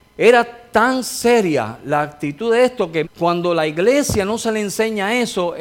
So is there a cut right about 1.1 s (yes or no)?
no